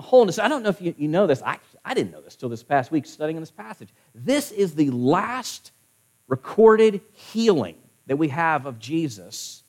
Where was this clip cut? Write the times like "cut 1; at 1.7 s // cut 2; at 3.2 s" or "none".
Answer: none